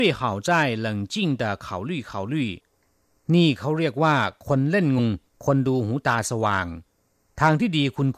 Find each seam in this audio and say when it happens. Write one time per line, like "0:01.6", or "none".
0:05.0